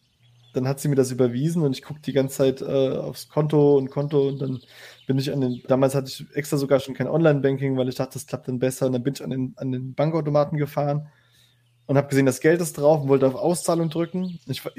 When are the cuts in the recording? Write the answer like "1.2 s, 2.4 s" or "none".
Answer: 5.7 s